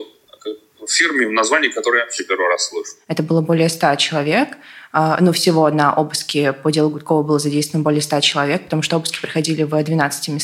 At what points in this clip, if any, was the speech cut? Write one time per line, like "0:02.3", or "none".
none